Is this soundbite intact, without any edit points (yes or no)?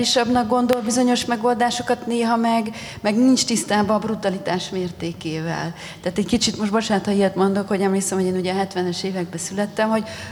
yes